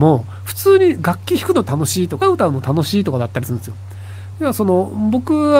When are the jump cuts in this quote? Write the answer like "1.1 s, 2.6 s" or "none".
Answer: 2.2 s, 4.3 s